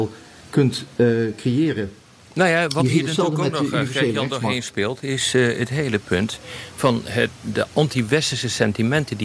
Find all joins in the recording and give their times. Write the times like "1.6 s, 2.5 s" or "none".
none